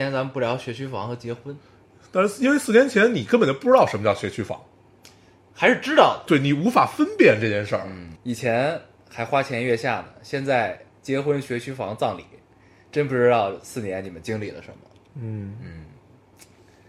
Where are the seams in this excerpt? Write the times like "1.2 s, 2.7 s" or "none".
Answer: 6.3 s, 8.2 s